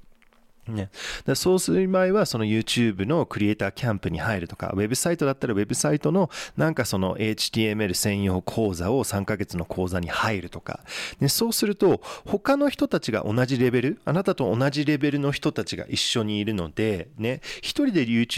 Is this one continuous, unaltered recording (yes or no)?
yes